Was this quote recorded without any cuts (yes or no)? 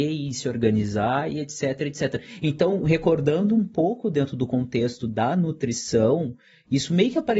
yes